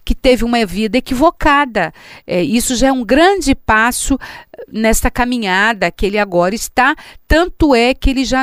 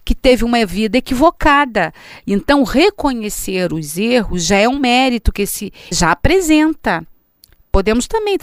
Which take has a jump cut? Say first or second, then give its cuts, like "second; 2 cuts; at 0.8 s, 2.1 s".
second; 2 cuts; at 2.2 s, 5.9 s